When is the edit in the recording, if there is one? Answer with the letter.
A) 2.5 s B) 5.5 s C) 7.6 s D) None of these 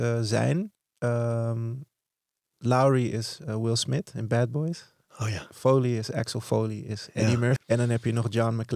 C